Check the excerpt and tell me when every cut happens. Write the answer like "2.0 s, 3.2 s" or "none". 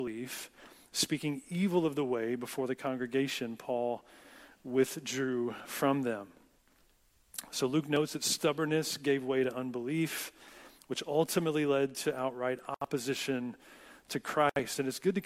none